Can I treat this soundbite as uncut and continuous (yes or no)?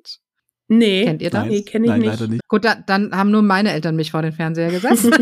no